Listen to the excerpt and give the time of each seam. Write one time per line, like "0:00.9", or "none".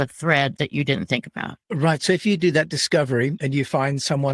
0:01.6

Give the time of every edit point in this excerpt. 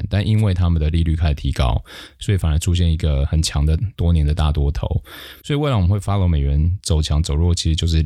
0:05.4

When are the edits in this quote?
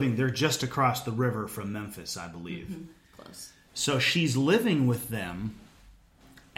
none

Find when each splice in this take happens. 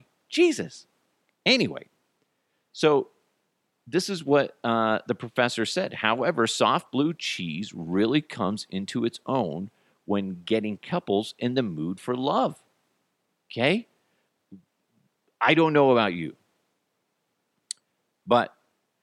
none

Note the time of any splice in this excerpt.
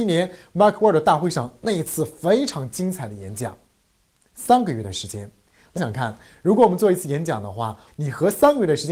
0:05.8
0:07.9

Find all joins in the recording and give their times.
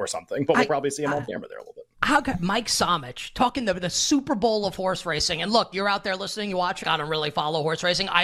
0:06.8

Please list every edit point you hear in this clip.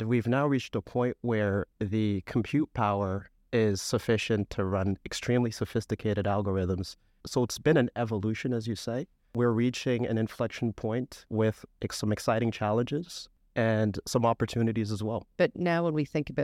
0:07.2
0:15.3

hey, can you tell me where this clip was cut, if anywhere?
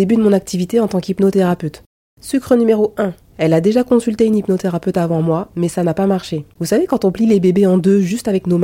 0:03.3
0:06.6

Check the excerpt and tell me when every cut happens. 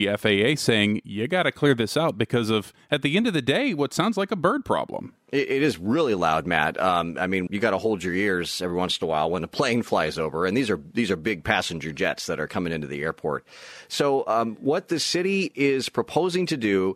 0:07.5

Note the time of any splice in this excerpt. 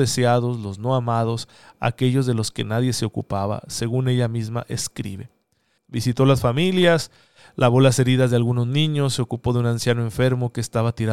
0:05.8

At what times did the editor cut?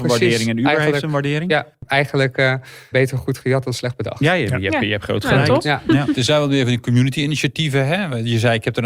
0:02.9

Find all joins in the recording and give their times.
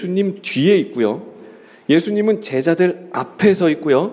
none

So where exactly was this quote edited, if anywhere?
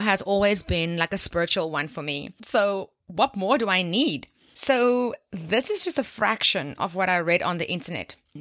0:02.4

